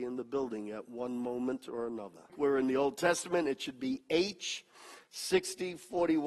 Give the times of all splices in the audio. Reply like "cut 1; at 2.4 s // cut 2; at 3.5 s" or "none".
cut 1; at 2.3 s